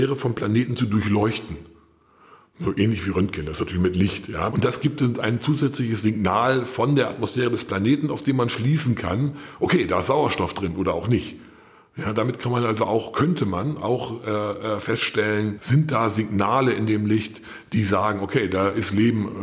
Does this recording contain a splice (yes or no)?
yes